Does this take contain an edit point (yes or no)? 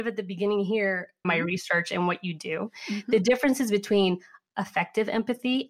yes